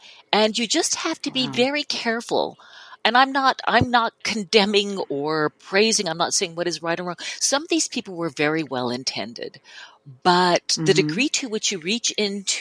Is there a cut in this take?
no; 0 cuts

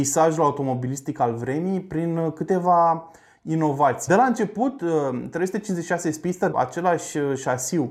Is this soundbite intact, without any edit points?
no; 2 cuts; at 4.1 s, 6.5 s

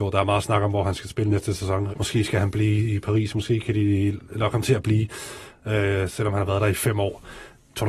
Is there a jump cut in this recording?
yes; 1 cut; at 1.9 s

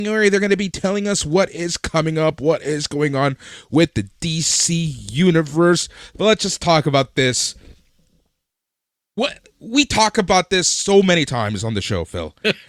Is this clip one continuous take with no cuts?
yes; 0 cuts

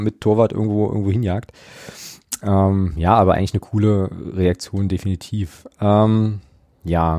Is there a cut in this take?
no; 0 cuts

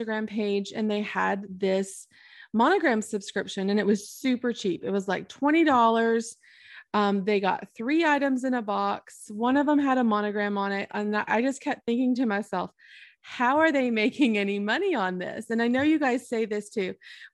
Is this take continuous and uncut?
yes; 0 cuts

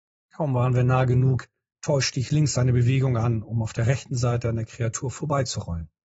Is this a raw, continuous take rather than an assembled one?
yes; 0 cuts

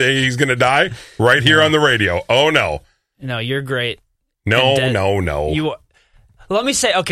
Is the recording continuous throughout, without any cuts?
yes; 0 cuts

